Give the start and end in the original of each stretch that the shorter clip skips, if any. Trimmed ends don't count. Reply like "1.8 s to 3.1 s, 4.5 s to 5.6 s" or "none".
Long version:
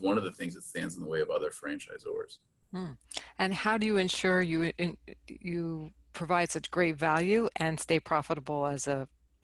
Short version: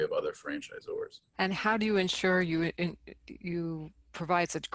2.5 s to 3.3 s